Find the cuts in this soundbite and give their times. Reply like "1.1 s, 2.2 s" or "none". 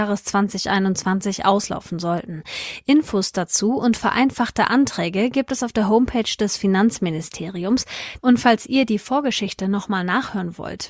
8.2 s